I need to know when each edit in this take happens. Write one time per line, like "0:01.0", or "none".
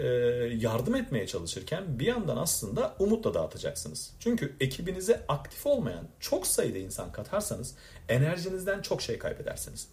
none